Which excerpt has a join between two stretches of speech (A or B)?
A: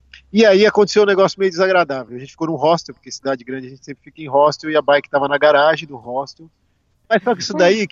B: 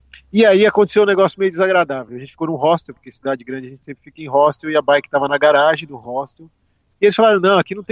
A